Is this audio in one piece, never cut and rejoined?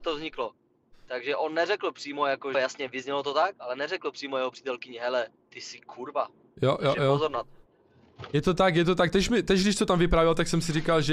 no; 1 cut; at 2.5 s

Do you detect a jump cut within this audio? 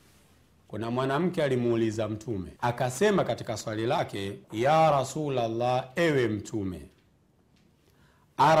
yes; 2 cuts; at 2.6 s, 4.4 s

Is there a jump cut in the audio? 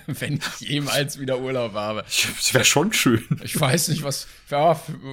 no; 0 cuts

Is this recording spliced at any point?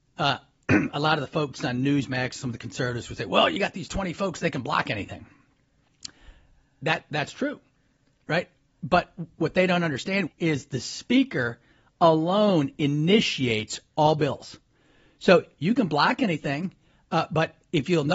yes; 1 cut; at 10.3 s

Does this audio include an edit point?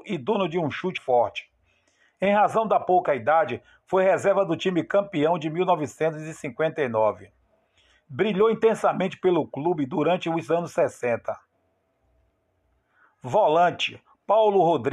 yes; 1 cut; at 1.0 s

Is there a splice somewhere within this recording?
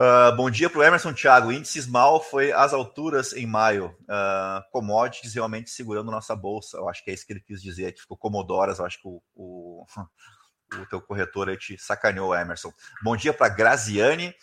no; 0 cuts

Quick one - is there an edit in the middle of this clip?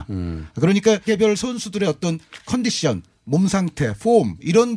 yes; 1 cut; at 1.1 s

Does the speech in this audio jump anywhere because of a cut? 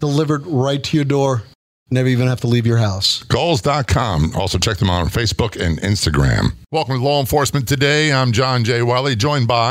no; 0 cuts

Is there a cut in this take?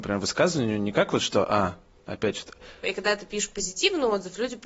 yes; 1 cut; at 2.8 s

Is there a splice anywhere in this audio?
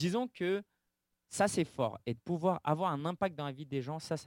no; 0 cuts

